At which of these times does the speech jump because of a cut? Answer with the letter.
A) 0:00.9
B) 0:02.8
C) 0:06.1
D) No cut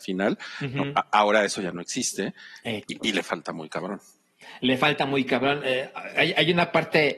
B